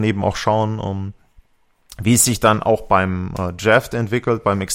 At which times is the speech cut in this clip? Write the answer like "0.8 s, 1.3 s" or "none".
none

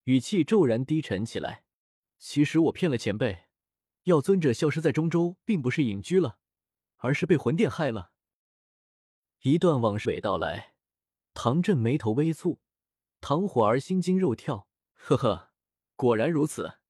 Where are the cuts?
10.0 s, 13.1 s, 14.8 s

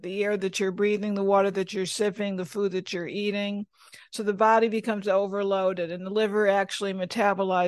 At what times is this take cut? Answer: none

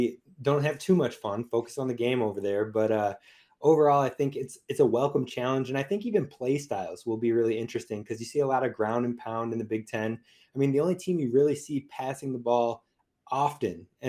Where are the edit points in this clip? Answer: none

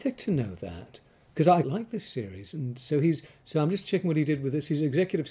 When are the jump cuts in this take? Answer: 1.6 s

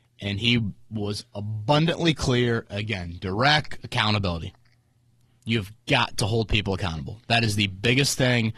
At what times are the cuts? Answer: 3.8 s

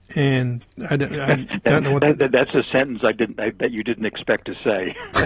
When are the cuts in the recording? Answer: none

